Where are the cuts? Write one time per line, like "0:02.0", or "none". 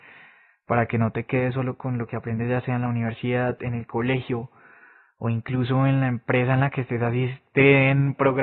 none